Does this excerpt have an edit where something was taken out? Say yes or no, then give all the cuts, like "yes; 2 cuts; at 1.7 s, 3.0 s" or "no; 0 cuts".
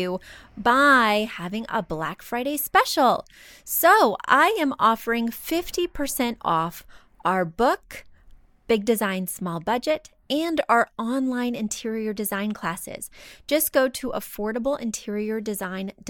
no; 0 cuts